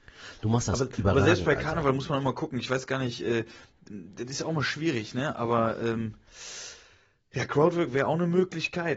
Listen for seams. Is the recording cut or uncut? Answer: uncut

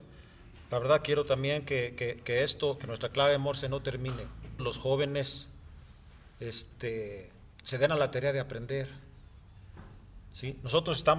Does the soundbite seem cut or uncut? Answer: cut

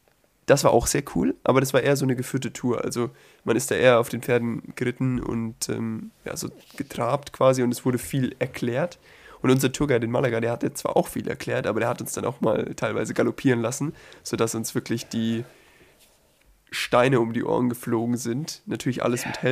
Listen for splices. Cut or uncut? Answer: uncut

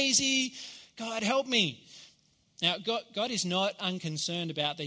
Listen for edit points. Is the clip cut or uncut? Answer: uncut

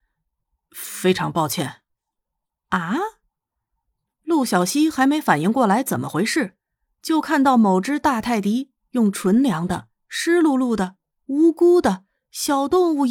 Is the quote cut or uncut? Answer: uncut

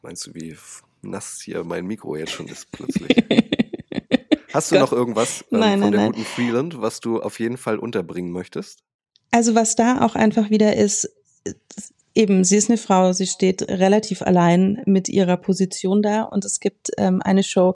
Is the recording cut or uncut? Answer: uncut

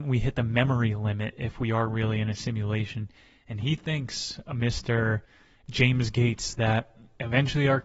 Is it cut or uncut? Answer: uncut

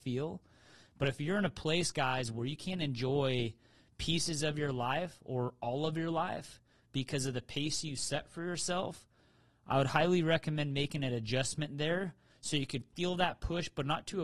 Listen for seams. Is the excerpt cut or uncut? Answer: uncut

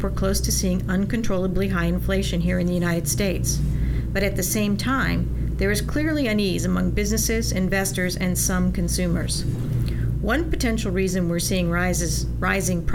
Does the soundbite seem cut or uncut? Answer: uncut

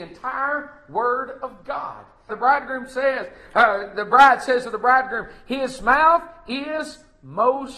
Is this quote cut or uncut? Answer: cut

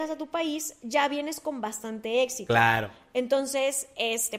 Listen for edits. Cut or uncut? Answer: uncut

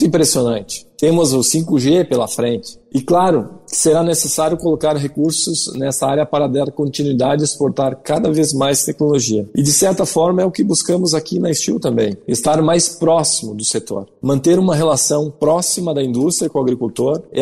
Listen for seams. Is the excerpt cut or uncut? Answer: uncut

